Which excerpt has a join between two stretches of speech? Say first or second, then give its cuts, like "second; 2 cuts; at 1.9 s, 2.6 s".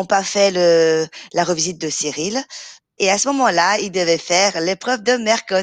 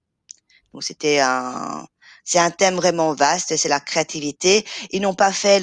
first; 1 cut; at 3.0 s